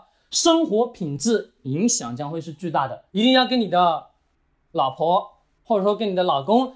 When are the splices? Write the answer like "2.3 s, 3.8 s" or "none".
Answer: 3.1 s